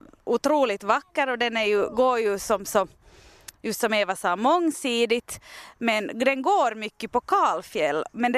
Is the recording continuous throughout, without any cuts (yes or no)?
yes